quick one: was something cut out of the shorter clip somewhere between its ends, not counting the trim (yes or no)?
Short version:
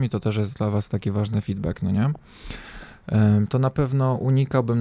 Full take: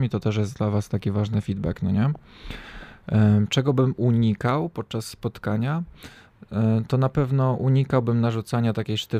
yes